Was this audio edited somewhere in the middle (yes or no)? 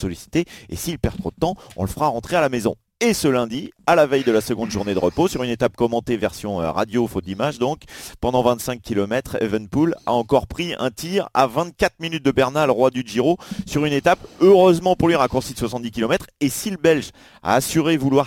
no